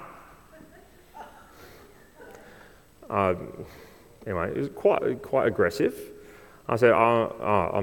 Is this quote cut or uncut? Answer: uncut